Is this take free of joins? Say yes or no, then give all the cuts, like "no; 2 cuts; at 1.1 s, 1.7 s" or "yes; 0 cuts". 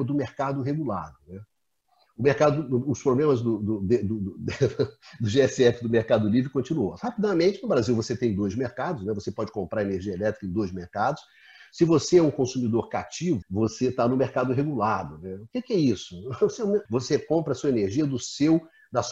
no; 2 cuts; at 13.4 s, 16.9 s